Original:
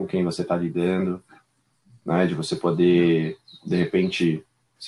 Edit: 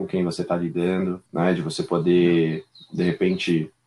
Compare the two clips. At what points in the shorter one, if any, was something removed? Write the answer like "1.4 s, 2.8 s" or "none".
1.3 s